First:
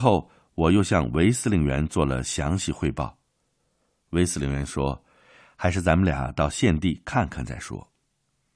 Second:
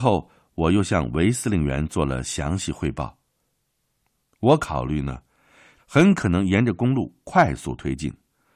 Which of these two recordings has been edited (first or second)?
second